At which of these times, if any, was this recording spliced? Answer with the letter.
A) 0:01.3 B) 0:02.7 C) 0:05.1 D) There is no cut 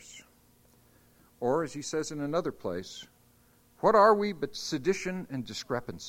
D